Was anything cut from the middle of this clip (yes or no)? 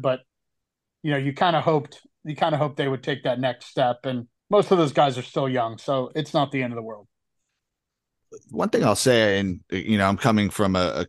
yes